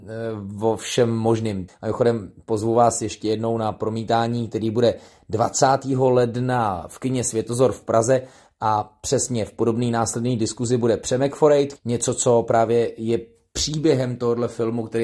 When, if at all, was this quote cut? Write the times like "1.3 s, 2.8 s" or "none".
1.7 s, 11.8 s